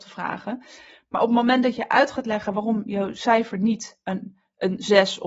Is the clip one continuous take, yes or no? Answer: yes